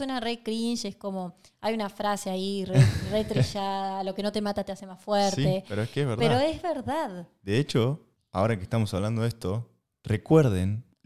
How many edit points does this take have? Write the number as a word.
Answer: zero